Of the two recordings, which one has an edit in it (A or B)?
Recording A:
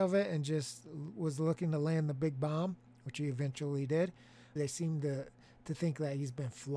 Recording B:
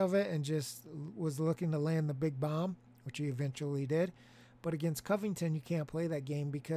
A